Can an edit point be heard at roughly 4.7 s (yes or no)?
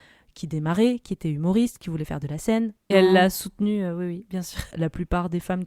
yes